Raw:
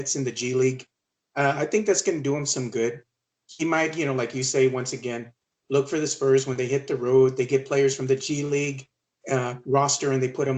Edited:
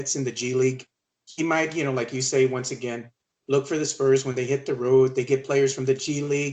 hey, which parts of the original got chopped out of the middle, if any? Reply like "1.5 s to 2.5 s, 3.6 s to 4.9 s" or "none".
1.1 s to 3.4 s